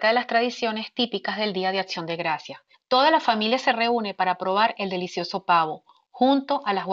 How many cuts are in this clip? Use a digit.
1